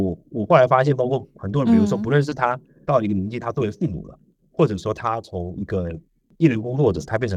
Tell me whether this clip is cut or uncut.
uncut